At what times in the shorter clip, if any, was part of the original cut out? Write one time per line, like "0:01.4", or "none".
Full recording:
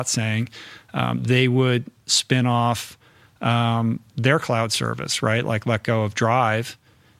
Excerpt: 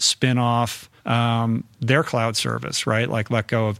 0:01.0